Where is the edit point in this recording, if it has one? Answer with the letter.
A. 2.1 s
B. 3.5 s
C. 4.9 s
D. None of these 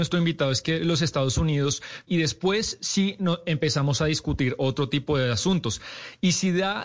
A